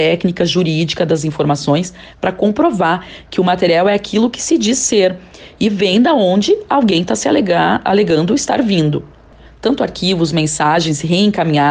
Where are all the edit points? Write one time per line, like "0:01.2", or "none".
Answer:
0:09.5